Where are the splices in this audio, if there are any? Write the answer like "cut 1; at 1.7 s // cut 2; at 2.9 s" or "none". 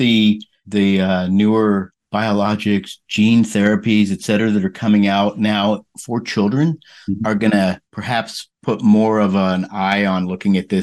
none